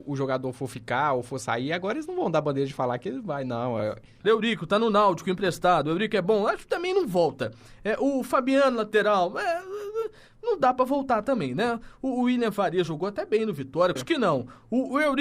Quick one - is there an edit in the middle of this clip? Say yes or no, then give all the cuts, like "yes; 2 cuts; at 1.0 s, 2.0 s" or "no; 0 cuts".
yes; 2 cuts; at 4.2 s, 14.0 s